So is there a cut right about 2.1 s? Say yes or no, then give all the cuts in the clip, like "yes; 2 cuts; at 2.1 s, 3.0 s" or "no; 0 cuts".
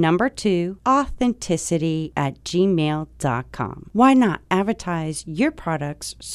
no; 1 cut; at 3.9 s